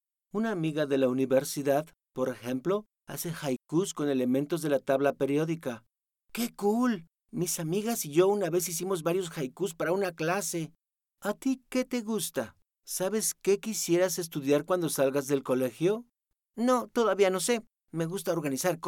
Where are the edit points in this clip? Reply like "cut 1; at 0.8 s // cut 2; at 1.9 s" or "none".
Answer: none